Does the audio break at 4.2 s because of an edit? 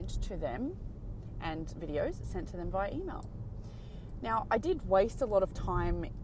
no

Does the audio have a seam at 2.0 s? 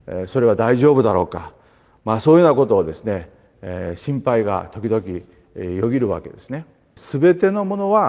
no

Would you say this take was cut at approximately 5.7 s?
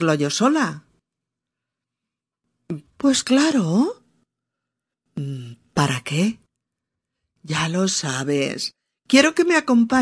no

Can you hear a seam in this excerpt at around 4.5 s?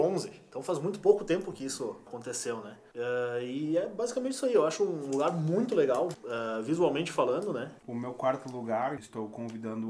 no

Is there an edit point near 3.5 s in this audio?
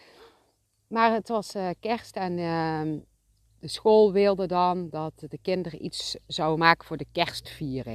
no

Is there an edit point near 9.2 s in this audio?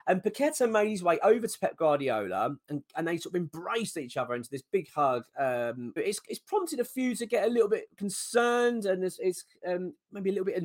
no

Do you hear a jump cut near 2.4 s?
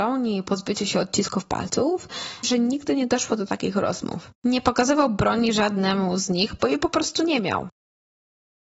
yes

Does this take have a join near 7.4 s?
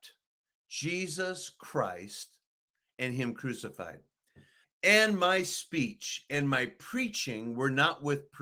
no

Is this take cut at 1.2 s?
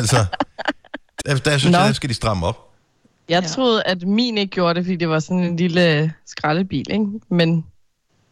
yes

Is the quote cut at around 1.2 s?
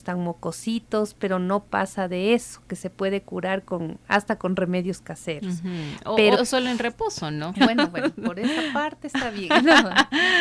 no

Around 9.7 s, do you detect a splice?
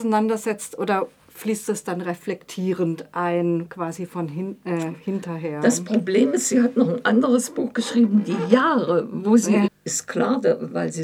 yes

